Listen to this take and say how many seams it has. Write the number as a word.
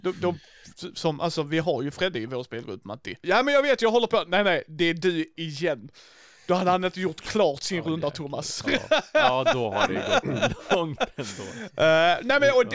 one